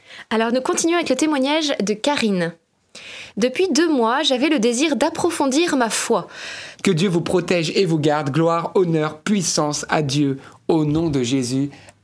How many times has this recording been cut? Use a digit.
1